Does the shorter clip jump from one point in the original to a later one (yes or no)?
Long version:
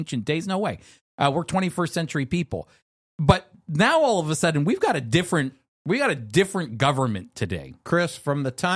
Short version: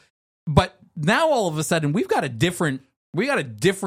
no